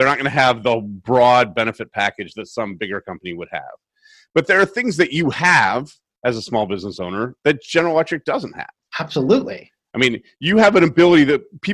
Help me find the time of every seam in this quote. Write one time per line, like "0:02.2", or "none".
none